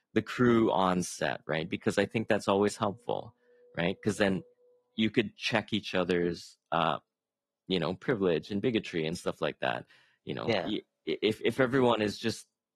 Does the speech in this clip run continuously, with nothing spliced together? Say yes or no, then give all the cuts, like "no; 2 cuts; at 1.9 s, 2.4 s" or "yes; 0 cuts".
yes; 0 cuts